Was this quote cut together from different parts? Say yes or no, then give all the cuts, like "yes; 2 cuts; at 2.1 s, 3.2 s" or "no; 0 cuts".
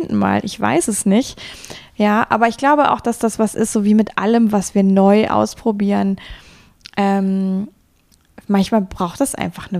no; 0 cuts